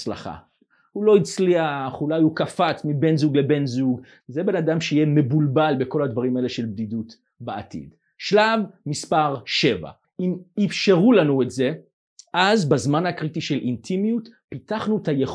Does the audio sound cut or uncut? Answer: cut